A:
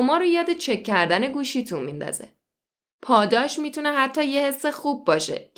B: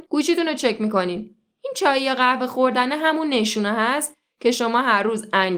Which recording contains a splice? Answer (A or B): A